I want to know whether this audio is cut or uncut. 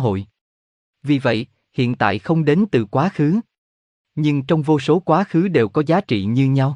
uncut